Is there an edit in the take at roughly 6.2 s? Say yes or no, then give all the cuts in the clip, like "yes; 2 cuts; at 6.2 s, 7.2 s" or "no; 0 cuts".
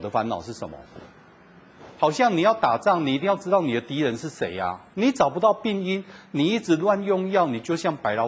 no; 1 cut; at 4.9 s